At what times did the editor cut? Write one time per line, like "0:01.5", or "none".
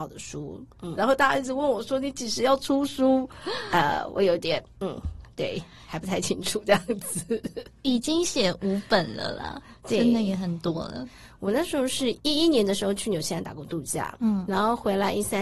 0:01.0